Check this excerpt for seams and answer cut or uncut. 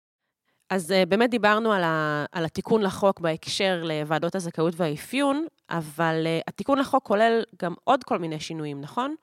uncut